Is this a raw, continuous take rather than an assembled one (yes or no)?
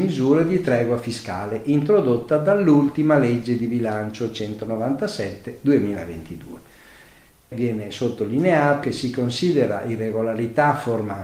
no